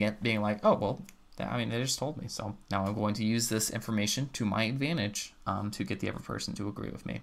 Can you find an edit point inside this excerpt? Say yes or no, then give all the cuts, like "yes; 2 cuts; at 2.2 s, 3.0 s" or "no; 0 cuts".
yes; 1 cut; at 2.6 s